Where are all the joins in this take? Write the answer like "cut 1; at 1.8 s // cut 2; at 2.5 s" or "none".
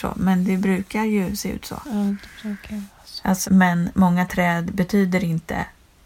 cut 1; at 3.4 s